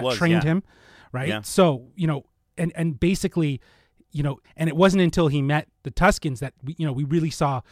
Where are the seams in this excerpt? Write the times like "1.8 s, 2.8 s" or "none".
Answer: 4.4 s